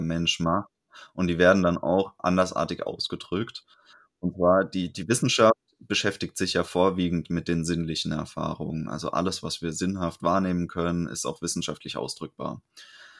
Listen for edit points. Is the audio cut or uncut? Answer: uncut